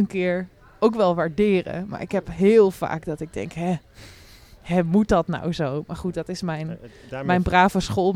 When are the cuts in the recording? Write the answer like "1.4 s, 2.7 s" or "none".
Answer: none